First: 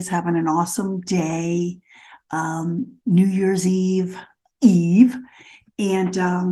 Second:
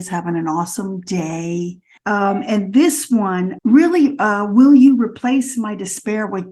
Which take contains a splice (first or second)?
second